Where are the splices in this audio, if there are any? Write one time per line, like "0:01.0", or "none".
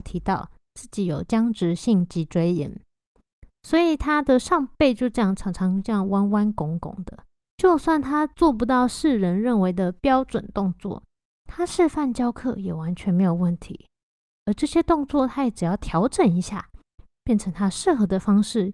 0:07.4